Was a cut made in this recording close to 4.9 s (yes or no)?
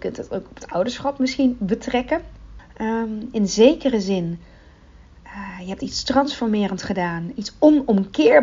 no